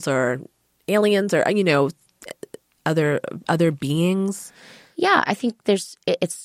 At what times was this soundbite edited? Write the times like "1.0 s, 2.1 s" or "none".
5.3 s